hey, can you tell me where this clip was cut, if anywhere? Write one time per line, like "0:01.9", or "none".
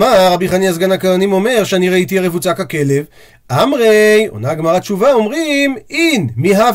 none